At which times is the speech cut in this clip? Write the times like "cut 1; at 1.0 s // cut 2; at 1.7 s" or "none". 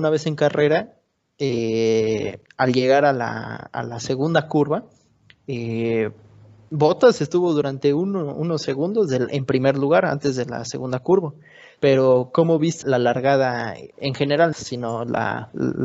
cut 1; at 11.8 s // cut 2; at 12.8 s // cut 3; at 14.5 s